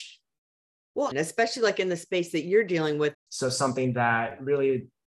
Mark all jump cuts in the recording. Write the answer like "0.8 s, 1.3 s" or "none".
1.1 s, 3.1 s